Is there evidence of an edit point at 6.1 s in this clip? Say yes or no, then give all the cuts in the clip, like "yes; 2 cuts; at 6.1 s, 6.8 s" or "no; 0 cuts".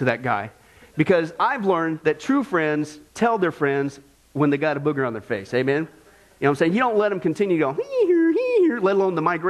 no; 0 cuts